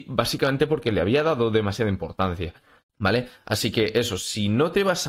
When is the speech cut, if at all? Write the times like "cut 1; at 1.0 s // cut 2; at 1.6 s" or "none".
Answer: cut 1; at 2.9 s